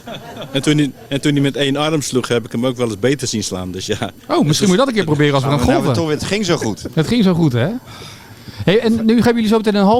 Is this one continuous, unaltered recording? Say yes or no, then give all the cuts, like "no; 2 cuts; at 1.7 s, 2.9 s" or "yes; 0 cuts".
yes; 0 cuts